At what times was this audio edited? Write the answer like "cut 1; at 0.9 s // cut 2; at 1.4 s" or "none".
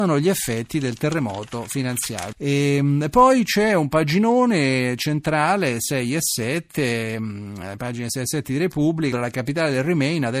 cut 1; at 2.3 s // cut 2; at 9.1 s